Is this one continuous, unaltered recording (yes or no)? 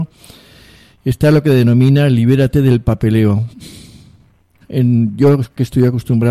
no